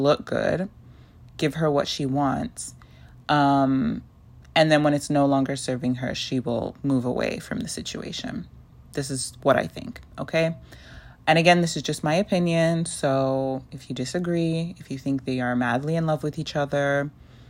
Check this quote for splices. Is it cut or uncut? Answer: uncut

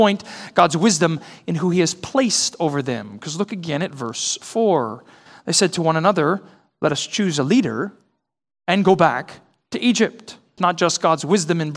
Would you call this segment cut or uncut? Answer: cut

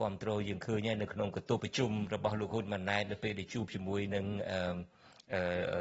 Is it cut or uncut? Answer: cut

